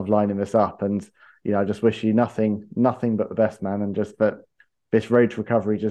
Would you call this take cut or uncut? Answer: uncut